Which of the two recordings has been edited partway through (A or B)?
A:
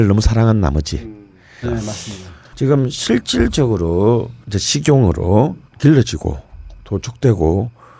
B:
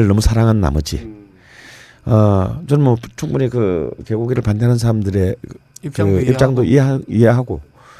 A